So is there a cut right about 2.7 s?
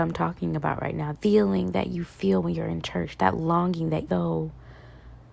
no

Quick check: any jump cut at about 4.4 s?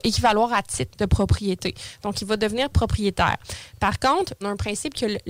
yes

